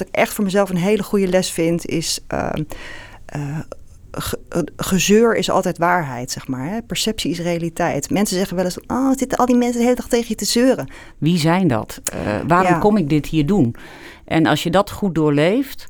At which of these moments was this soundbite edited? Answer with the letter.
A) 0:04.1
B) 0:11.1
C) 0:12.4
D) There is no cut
B